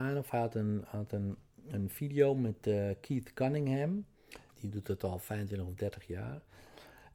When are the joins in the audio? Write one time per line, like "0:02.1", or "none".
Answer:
0:04.5